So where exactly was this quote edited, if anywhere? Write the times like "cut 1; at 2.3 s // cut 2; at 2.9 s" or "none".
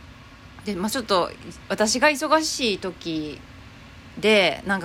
cut 1; at 0.9 s